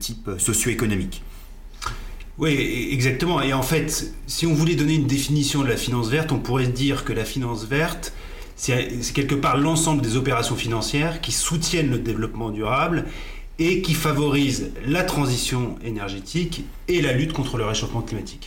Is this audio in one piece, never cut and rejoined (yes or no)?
yes